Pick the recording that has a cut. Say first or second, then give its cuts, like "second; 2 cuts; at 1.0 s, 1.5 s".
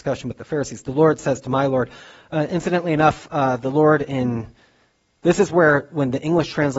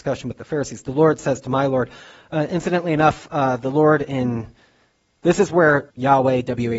second; 1 cut; at 5.9 s